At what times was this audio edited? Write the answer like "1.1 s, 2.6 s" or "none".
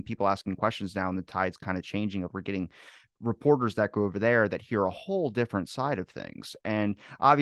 2.3 s